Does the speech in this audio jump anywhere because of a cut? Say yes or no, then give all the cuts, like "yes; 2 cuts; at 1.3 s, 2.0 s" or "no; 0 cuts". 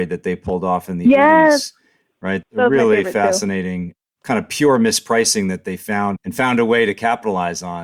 yes; 2 cuts; at 2.4 s, 6.2 s